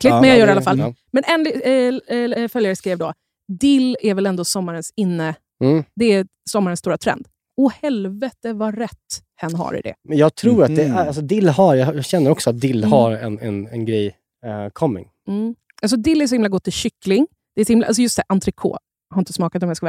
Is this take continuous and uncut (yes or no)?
no